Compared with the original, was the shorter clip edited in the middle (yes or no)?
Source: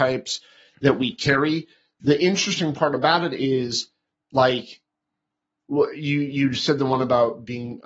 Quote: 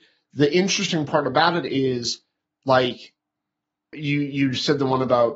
yes